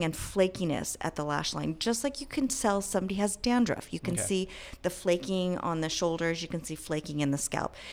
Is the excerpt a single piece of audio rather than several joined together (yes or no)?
yes